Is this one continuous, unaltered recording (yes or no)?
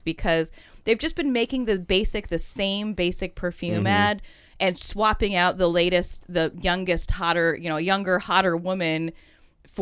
yes